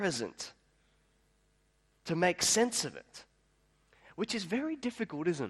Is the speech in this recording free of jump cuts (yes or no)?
yes